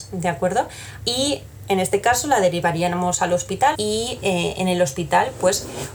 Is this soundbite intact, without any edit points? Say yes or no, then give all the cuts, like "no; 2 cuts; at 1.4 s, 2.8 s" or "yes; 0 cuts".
no; 2 cuts; at 1.0 s, 3.7 s